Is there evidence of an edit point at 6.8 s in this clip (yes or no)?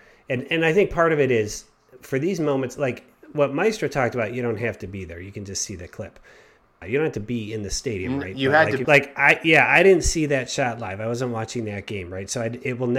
yes